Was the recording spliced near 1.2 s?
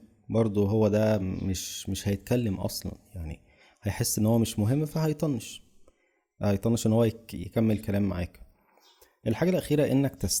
no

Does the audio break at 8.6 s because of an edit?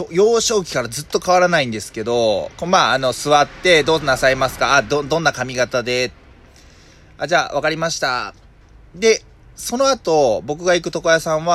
no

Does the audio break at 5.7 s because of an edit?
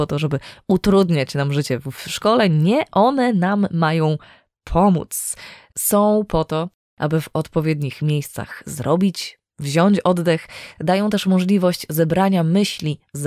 no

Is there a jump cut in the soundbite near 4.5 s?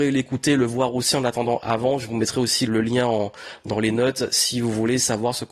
no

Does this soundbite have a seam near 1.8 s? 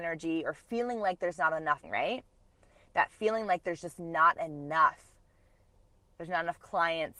yes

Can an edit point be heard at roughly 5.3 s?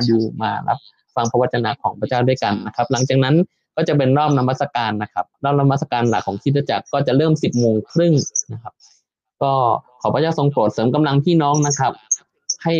yes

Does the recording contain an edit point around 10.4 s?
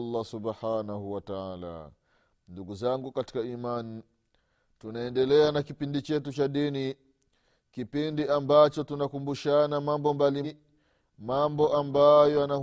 yes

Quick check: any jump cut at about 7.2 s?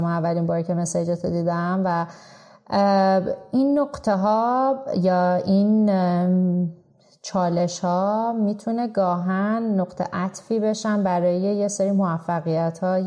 no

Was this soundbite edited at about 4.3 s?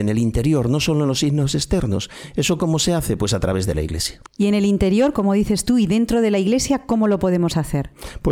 yes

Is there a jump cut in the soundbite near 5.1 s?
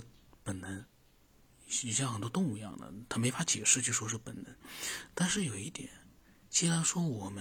no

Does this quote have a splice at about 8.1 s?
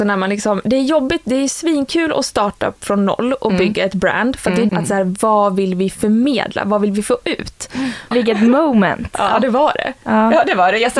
yes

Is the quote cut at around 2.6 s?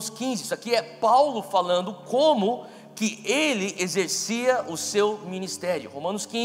no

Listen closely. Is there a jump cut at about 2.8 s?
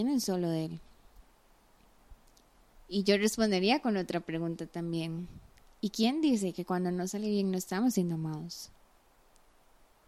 yes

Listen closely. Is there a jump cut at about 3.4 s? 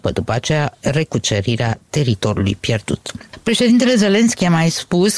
yes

